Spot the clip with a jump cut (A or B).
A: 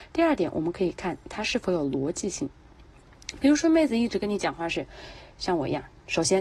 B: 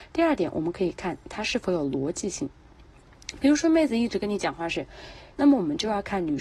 B